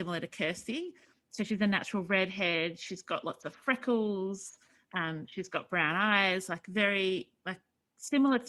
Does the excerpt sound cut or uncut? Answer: uncut